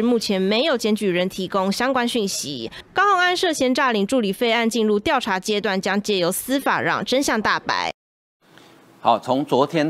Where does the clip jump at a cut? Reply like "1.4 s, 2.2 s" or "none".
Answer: none